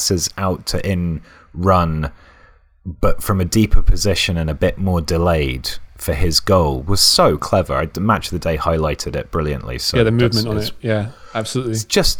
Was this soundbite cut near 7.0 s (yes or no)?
no